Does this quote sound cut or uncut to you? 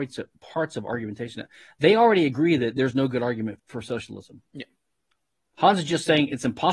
cut